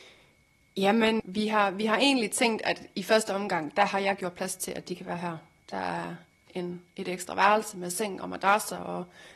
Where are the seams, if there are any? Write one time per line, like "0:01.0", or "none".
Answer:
0:01.2